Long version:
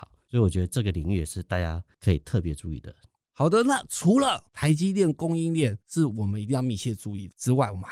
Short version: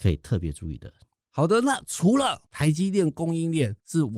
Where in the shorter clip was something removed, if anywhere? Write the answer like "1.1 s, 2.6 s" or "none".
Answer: none